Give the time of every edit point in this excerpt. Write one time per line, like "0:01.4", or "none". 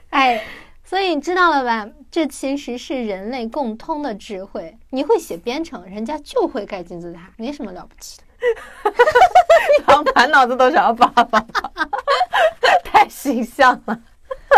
0:07.3
0:12.0